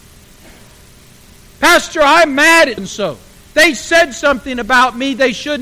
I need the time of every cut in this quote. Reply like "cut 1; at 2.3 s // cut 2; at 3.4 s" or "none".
cut 1; at 2.8 s